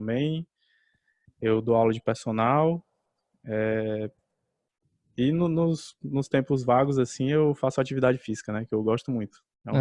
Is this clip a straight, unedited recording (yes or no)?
yes